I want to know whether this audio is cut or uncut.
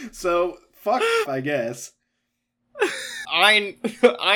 cut